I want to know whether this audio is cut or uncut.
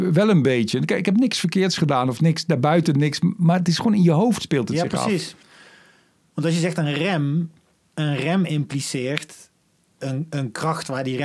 uncut